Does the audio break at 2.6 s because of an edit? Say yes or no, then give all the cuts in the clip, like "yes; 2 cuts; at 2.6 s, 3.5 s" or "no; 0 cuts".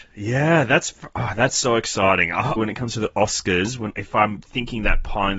yes; 1 cut; at 2.6 s